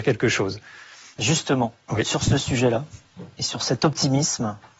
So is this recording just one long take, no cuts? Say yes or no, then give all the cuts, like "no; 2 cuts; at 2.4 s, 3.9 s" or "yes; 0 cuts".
yes; 0 cuts